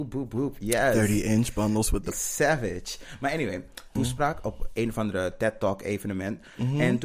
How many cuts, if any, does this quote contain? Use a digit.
2